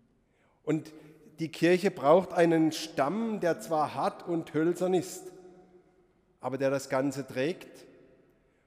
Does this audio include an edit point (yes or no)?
no